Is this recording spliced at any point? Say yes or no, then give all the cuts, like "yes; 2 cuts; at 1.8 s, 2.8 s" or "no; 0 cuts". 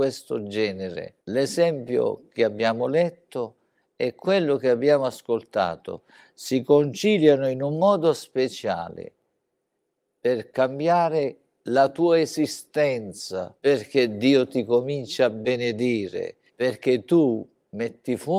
yes; 3 cuts; at 1.2 s, 13.6 s, 16.5 s